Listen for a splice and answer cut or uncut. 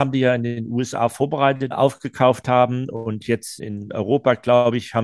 cut